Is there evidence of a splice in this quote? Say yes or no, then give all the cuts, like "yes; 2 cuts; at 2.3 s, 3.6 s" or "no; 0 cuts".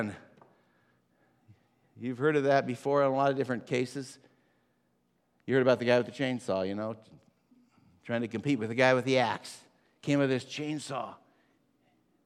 no; 0 cuts